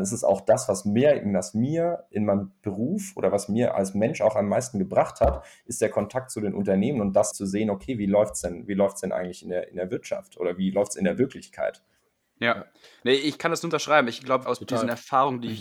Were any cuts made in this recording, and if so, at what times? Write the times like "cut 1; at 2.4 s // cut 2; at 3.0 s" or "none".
cut 1; at 7.3 s // cut 2; at 14.4 s